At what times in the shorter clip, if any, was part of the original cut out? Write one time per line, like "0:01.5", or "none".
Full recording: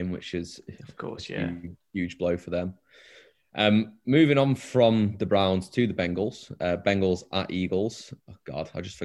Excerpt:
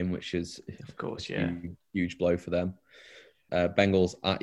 0:03.5